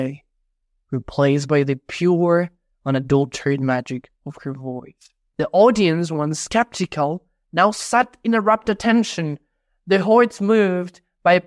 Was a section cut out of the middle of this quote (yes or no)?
yes